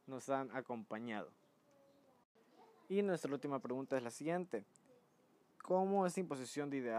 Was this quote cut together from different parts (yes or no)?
no